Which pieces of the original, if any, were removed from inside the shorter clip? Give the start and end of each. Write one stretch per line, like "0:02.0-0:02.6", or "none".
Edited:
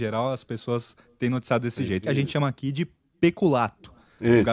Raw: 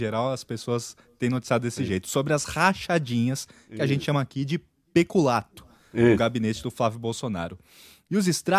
0:02.0-0:03.7